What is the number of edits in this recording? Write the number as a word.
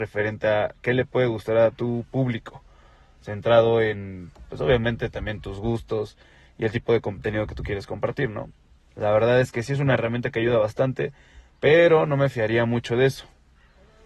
zero